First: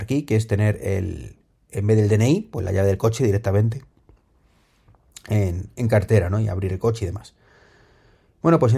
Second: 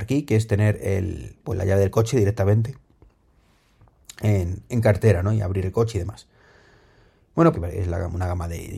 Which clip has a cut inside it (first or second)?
second